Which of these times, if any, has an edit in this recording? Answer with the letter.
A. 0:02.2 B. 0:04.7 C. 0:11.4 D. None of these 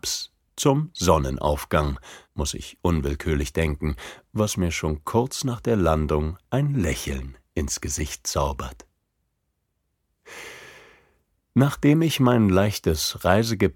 A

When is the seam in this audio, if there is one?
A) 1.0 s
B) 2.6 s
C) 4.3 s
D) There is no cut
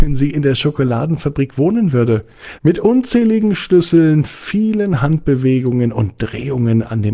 B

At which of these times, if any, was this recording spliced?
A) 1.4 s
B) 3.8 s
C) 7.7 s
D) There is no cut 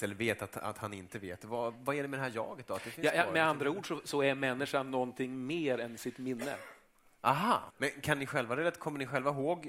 C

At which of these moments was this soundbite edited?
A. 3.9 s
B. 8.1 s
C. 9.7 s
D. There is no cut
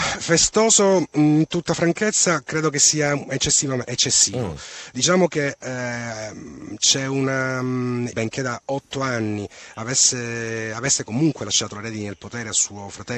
B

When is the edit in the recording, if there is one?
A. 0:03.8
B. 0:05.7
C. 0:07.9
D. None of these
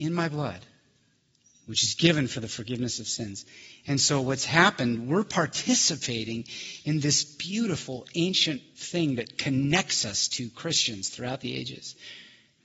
D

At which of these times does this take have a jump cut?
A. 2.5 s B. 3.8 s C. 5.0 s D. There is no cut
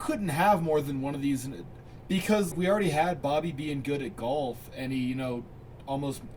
A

